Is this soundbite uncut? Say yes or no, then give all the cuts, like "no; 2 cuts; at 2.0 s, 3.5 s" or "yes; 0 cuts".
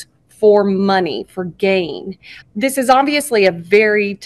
no; 1 cut; at 2.4 s